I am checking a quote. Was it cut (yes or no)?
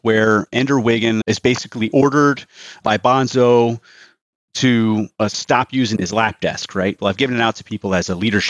yes